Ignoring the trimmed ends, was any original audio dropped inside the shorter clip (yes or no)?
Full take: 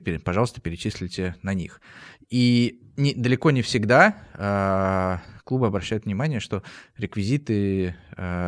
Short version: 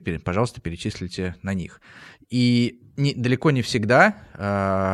no